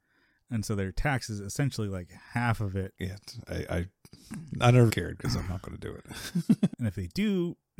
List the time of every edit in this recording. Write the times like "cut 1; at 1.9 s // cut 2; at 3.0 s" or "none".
cut 1; at 3.0 s // cut 2; at 4.9 s // cut 3; at 6.7 s